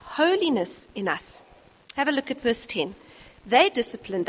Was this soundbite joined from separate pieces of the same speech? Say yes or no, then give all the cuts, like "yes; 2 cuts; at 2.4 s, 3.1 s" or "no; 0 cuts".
no; 0 cuts